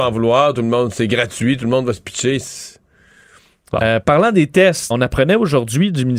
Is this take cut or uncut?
cut